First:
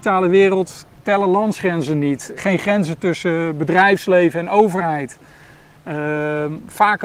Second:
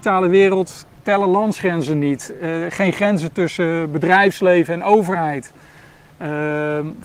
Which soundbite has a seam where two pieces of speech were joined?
first; 1 cut; at 2.4 s

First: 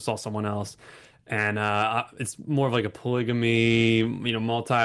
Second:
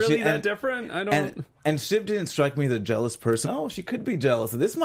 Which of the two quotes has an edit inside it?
second; 1 cut; at 3.4 s

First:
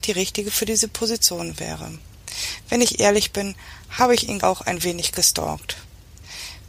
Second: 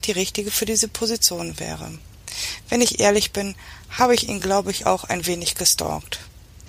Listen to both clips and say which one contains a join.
first; 1 cut; at 4.4 s

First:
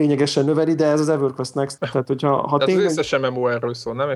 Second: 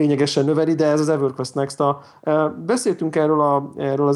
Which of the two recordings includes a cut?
first; 1 cut; at 1.8 s

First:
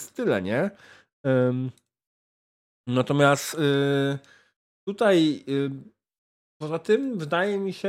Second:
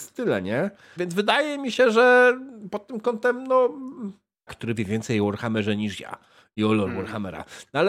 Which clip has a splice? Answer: second; 2 cuts; at 1.0 s, 4.5 s

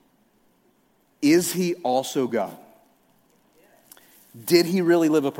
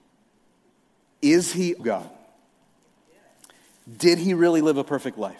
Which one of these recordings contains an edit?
second; 1 cut; at 1.8 s

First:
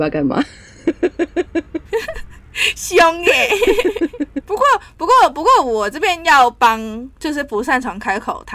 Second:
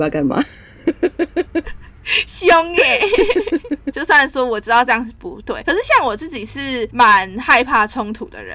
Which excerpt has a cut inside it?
second; 2 cuts; at 1.6 s, 3.9 s

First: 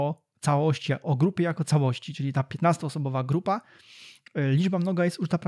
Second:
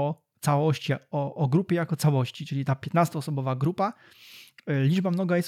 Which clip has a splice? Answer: first; 1 cut; at 1.0 s

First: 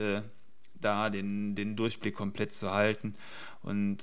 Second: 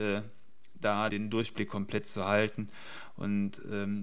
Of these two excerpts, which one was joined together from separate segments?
second; 1 cut; at 1.1 s

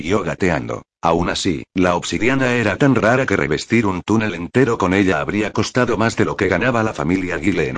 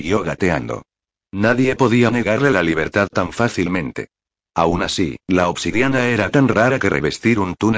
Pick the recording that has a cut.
first; 1 cut; at 1.0 s

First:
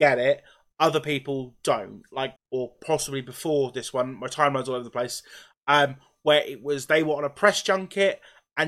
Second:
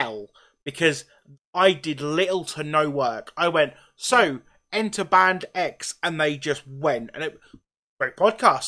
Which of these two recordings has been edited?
first; 1 cut; at 2.4 s

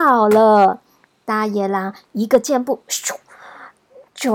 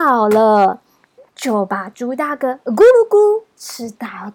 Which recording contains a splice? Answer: second; 1 cut; at 1.2 s

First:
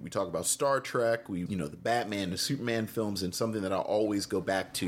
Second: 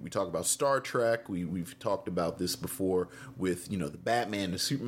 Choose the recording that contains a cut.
first; 1 cut; at 1.5 s

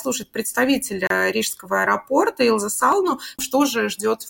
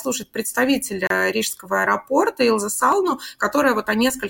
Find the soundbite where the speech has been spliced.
first; 1 cut; at 3.4 s

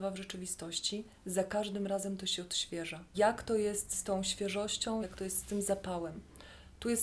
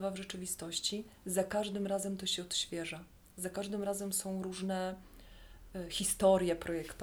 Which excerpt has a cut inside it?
first; 2 cuts; at 3.1 s, 5.0 s

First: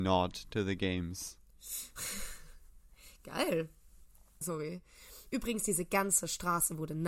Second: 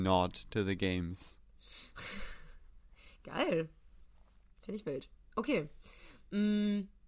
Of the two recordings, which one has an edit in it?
first; 1 cut; at 4.4 s

